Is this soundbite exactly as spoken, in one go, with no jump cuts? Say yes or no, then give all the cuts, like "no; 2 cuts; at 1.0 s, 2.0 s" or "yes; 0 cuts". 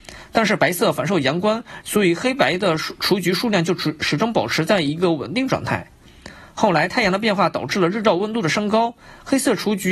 no; 1 cut; at 1.8 s